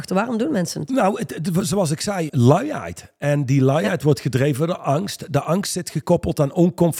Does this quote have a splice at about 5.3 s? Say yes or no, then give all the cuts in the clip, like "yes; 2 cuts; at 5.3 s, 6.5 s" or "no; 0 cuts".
no; 1 cut; at 2.3 s